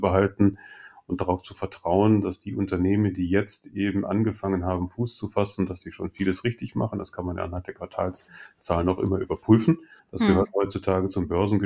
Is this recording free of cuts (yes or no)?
no